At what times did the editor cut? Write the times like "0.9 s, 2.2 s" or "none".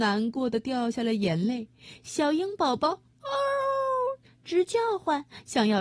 none